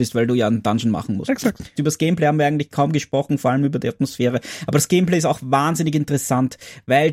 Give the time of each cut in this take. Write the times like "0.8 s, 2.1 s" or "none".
1.8 s